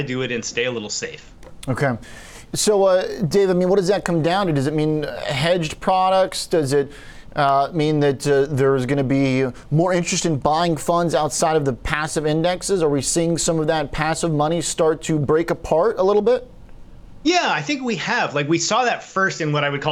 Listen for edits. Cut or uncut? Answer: uncut